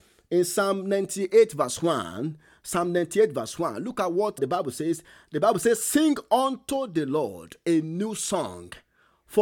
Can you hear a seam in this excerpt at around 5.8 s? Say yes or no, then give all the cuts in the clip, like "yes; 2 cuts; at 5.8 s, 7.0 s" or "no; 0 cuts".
no; 1 cut; at 4.4 s